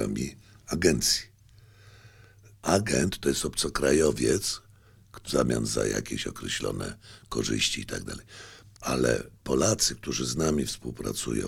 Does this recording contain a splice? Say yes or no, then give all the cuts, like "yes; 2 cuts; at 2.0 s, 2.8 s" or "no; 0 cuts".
yes; 3 cuts; at 2.5 s, 5.2 s, 8.7 s